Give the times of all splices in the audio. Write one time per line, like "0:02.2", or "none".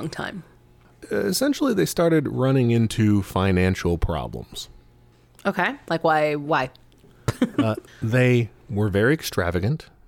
0:07.9